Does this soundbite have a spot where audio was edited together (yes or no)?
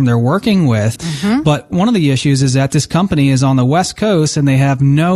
yes